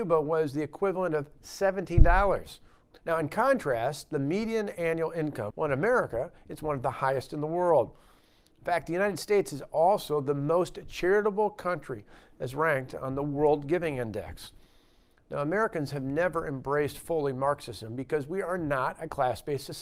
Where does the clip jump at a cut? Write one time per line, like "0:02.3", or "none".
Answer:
0:02.9
0:05.5